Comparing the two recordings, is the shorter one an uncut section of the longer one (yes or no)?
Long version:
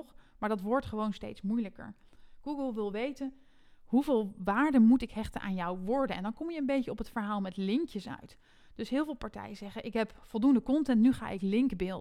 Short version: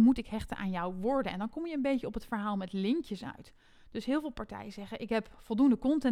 yes